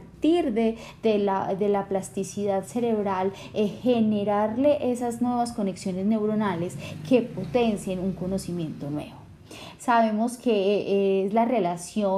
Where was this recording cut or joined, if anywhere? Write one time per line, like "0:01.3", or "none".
0:09.8